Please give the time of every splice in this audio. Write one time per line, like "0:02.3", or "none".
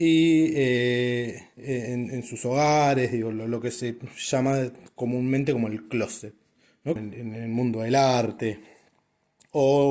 0:07.0